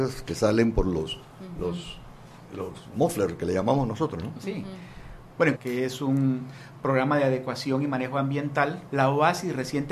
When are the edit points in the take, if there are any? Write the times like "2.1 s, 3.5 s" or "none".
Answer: 5.5 s, 8.9 s